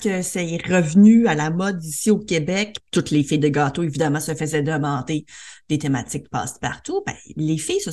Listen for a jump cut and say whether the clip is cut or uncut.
cut